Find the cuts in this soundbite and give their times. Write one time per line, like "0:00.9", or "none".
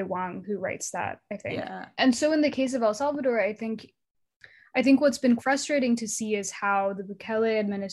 0:01.9
0:05.4